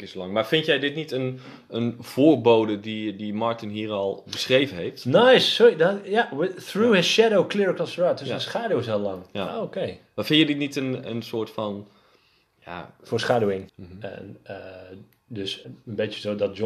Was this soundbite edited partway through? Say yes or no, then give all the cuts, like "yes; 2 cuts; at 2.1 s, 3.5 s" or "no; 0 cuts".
yes; 2 cuts; at 13.7 s, 15.6 s